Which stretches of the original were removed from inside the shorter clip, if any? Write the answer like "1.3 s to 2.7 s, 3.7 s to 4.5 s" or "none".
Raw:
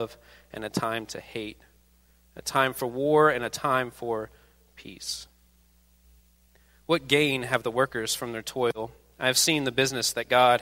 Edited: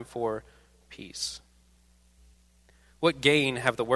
none